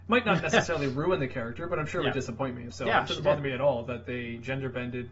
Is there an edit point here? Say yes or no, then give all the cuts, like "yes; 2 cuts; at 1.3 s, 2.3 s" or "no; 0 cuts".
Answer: yes; 1 cut; at 2.7 s